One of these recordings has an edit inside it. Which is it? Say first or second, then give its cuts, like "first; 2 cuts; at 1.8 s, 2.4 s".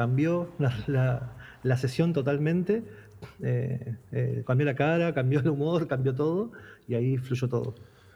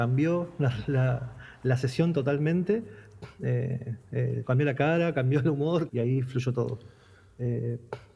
second; 1 cut; at 5.9 s